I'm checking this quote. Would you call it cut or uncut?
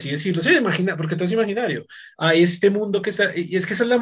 uncut